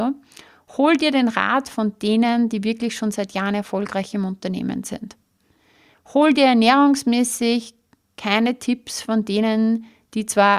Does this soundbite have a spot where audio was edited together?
no; 0 cuts

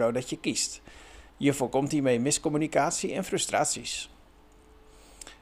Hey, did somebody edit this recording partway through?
yes; 1 cut; at 1.3 s

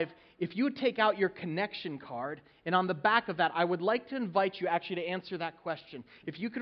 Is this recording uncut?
yes; 0 cuts

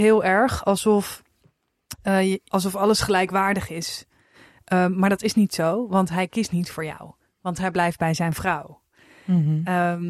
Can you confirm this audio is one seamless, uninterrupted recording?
no; 1 cut; at 2.5 s

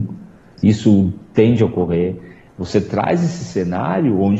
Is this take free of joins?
no; 1 cut; at 2.5 s

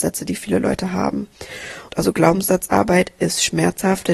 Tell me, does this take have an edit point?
yes; 1 cut; at 1.9 s

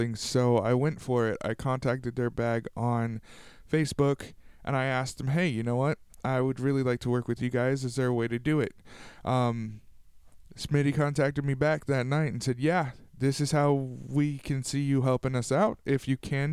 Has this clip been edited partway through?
no; 0 cuts

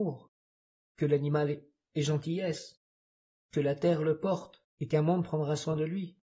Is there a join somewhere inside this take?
yes; 1 cut; at 4.7 s

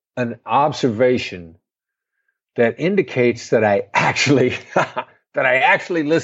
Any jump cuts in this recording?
no; 0 cuts

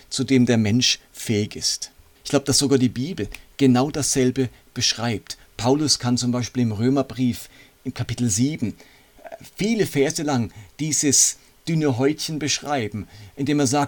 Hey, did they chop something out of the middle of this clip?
yes; 1 cut; at 2.2 s

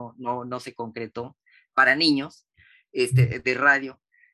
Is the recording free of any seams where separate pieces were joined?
yes; 0 cuts

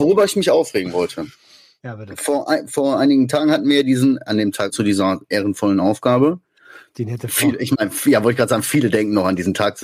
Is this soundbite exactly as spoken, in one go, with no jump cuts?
no; 1 cut; at 4.7 s

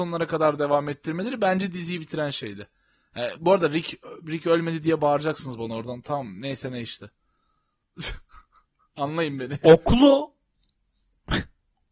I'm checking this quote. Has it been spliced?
no; 0 cuts

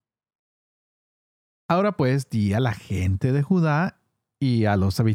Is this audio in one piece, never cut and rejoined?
yes; 0 cuts

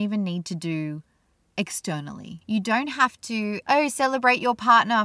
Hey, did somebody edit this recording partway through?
yes; 2 cuts; at 2.4 s, 3.6 s

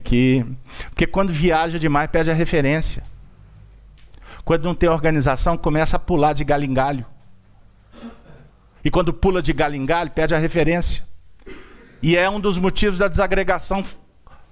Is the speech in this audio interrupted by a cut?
no; 0 cuts

